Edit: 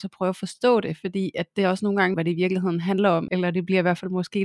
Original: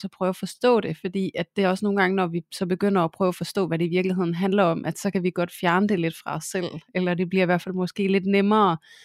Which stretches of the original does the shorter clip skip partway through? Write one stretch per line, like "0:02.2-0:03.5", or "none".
0:02.1-0:03.7
0:04.8-0:06.9

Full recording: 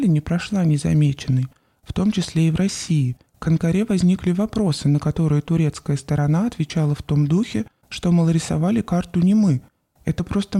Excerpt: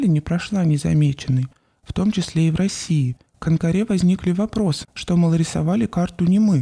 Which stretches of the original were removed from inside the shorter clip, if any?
0:04.8-0:07.8

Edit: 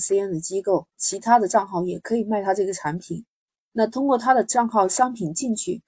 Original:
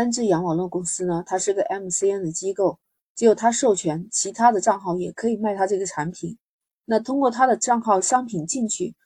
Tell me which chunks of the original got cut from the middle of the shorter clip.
0:02.9-0:04.1

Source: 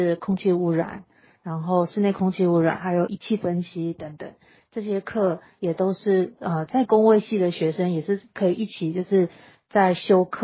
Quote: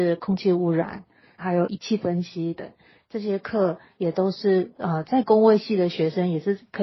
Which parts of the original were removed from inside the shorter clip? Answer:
0:01.4-0:02.8
0:04.0-0:04.2

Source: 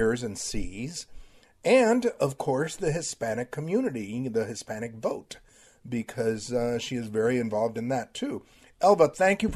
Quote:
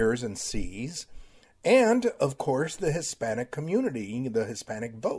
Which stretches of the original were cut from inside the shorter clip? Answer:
none

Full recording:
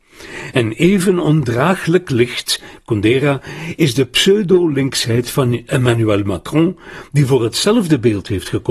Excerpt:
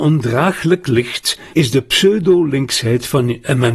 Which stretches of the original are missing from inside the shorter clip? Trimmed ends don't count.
0:02.8-0:03.8

